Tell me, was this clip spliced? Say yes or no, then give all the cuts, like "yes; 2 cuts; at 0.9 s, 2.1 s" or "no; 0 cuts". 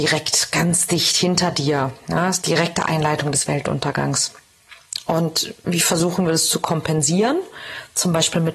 no; 0 cuts